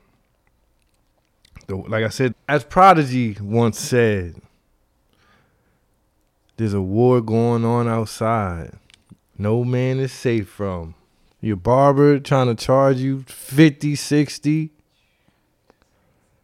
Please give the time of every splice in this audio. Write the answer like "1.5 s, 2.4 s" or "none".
2.3 s, 11.3 s

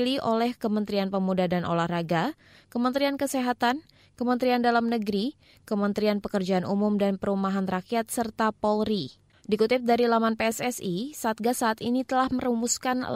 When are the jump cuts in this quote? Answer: 9.3 s

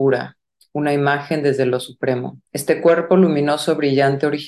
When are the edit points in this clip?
2.5 s

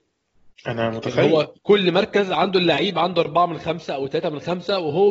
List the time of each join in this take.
1.6 s

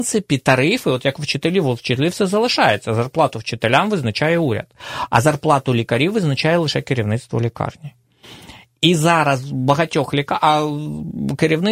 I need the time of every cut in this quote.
none

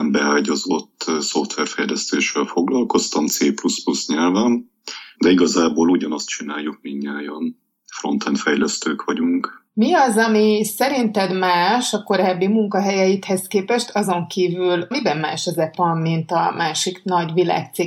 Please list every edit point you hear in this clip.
3.3 s, 5.1 s, 14.9 s

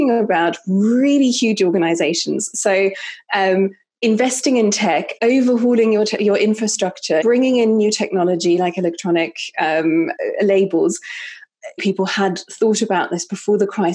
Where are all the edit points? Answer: 7.2 s, 11.8 s

